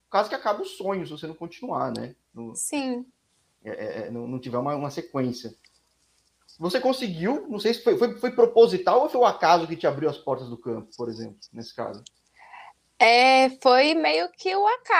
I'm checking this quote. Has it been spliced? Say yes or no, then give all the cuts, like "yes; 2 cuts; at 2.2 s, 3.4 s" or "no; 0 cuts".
no; 0 cuts